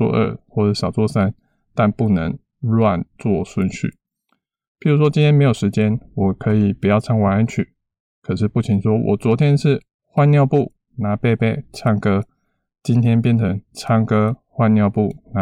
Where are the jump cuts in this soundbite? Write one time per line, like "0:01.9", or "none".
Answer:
none